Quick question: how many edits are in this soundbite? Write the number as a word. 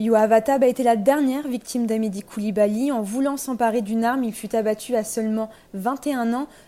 zero